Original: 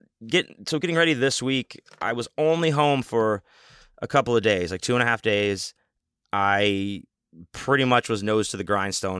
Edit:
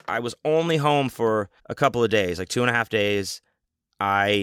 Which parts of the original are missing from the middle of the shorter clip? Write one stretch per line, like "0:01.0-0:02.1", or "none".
0:03.5-0:03.9